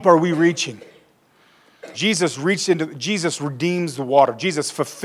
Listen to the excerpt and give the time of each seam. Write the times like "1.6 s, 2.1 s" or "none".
1.9 s